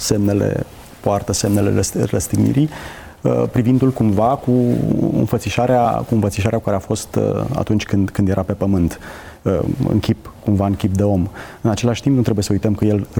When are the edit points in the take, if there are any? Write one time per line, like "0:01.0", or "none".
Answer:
none